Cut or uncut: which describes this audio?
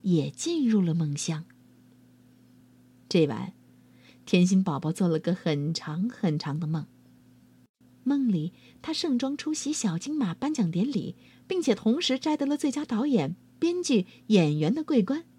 uncut